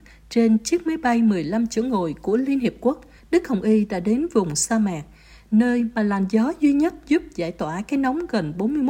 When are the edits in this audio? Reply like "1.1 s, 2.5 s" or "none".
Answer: 3.2 s

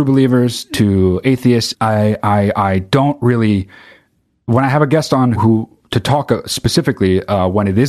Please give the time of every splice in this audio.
1.7 s, 5.3 s

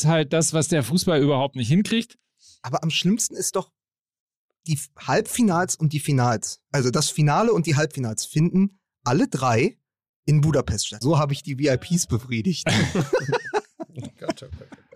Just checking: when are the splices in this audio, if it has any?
4.6 s, 11.0 s

